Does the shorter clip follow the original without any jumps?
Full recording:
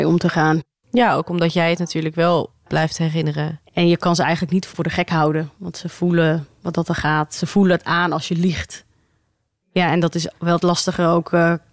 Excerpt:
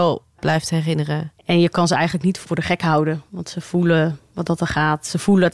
yes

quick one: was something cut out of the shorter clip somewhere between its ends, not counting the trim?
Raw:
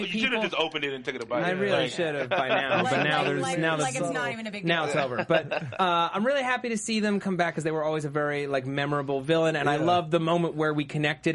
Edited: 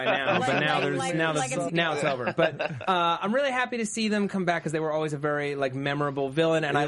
yes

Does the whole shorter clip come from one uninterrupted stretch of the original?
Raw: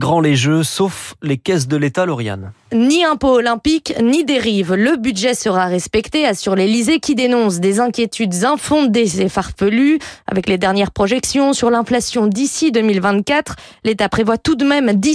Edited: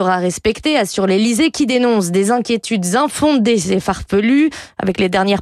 yes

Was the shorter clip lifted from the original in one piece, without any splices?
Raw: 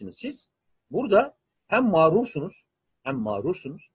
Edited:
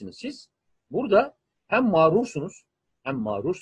yes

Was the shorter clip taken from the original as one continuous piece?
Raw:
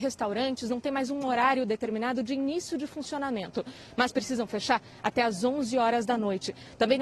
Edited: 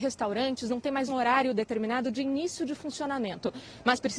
no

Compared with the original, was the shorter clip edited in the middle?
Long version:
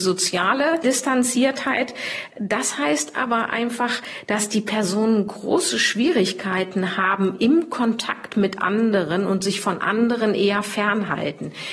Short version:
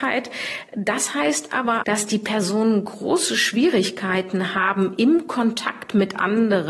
yes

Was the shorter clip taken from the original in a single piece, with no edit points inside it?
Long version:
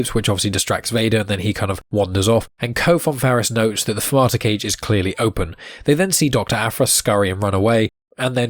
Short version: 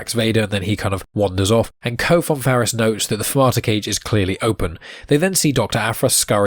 yes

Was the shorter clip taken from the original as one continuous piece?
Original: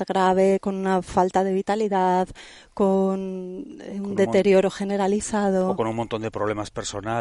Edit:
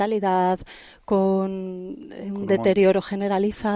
yes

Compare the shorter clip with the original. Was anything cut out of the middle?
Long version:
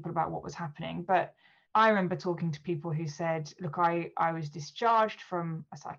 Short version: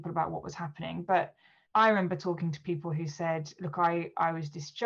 no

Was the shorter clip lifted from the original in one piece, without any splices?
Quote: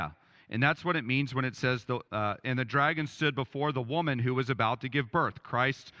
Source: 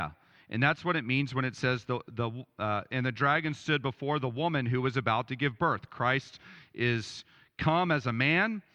no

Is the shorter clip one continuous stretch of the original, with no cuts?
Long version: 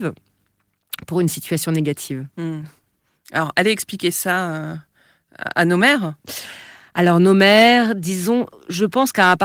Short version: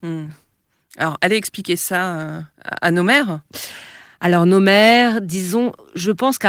no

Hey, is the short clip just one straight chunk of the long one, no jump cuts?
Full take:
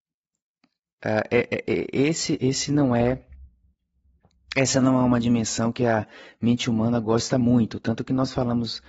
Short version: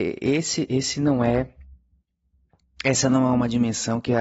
yes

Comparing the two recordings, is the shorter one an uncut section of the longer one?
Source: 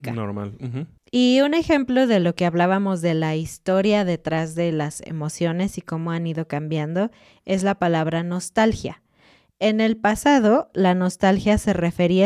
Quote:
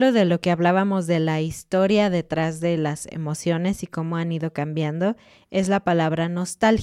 yes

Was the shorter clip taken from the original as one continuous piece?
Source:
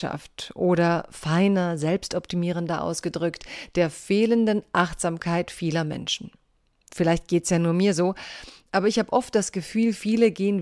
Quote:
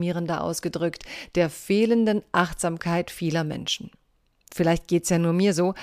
yes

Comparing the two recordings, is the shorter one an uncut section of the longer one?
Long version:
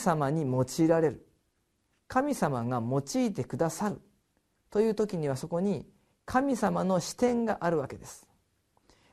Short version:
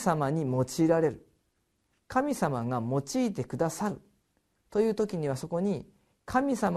yes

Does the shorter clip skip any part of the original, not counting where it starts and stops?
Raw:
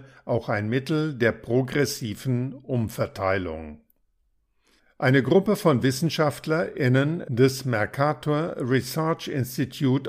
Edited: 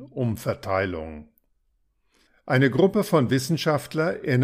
no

